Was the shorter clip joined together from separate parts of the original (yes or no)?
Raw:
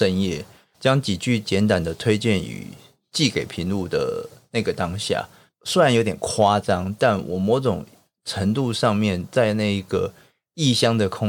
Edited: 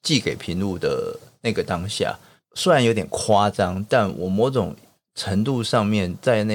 no